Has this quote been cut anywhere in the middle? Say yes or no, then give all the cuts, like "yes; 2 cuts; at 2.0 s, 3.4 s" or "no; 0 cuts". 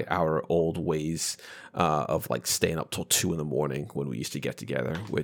no; 0 cuts